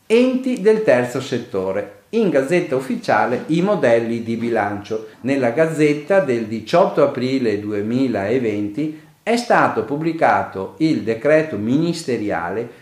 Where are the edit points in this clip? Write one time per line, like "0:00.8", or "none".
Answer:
0:05.1